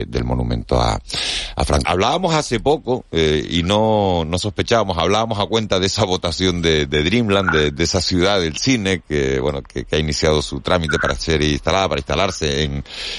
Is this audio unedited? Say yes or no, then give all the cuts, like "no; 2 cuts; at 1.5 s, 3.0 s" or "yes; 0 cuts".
no; 1 cut; at 1.8 s